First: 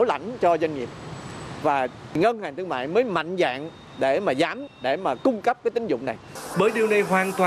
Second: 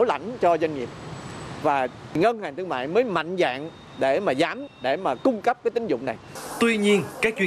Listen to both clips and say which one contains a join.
first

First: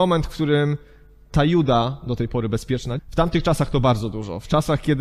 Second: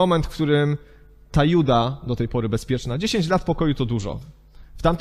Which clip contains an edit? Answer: first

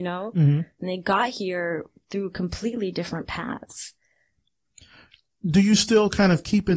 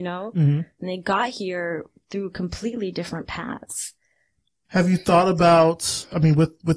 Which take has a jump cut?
second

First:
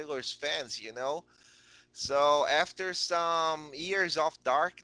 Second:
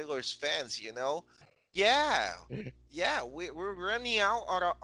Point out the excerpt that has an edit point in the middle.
second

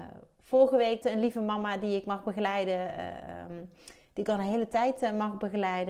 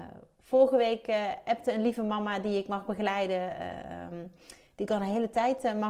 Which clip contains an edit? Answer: first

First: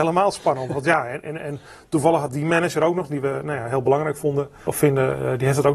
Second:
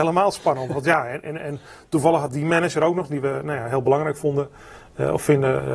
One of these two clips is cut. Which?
first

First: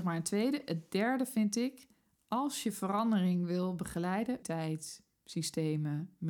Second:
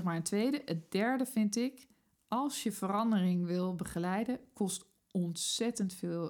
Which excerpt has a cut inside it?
first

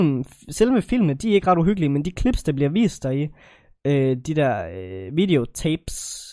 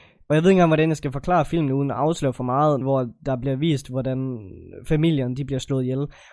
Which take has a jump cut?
second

